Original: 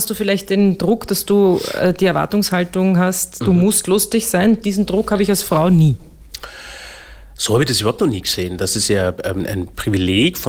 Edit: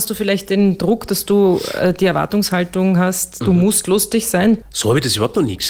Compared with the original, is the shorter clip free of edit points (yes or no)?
no